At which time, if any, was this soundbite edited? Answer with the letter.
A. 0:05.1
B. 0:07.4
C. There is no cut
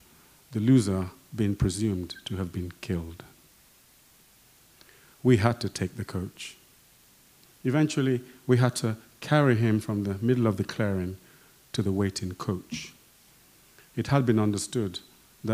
B